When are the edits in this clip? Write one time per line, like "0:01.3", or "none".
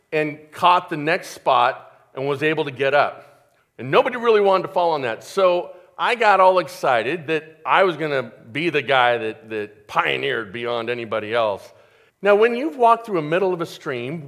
0:03.6
0:12.1